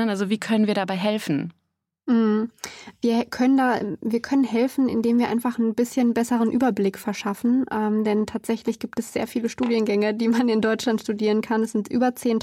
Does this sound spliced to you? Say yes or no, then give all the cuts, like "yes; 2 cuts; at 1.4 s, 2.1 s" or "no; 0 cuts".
no; 0 cuts